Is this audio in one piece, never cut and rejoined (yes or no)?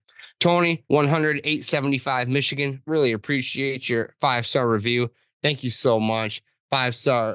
yes